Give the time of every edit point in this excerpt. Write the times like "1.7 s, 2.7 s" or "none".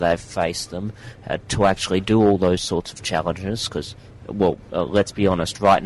none